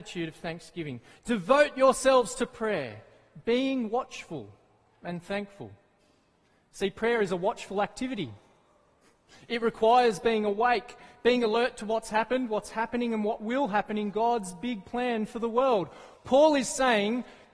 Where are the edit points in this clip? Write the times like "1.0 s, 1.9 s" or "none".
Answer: none